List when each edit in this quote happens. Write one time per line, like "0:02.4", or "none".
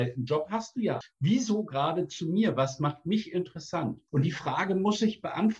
0:01.0
0:04.1